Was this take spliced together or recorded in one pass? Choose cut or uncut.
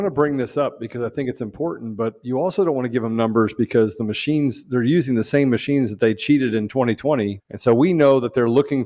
cut